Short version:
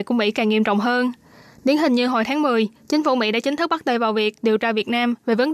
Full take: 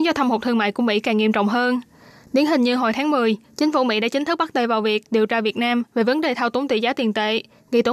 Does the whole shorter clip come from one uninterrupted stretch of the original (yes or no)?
yes